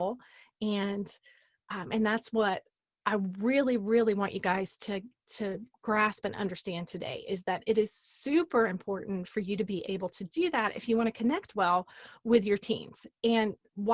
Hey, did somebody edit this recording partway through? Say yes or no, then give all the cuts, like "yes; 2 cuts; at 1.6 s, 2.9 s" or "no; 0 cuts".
no; 0 cuts